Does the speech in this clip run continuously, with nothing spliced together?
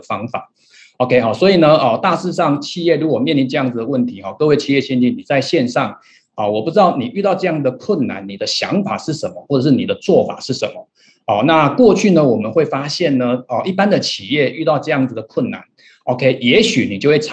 yes; 0 cuts

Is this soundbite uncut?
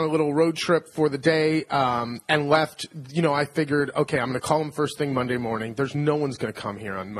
yes; 0 cuts

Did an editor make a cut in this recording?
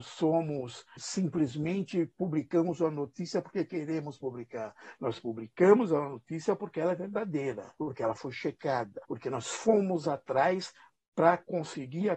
yes; 2 cuts; at 1.0 s, 9.0 s

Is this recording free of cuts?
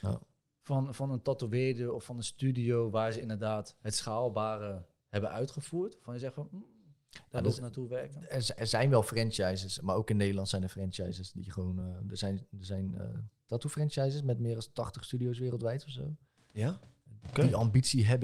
yes; 0 cuts

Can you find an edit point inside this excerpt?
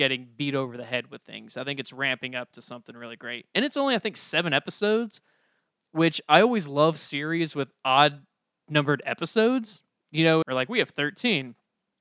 yes; 1 cut; at 10.4 s

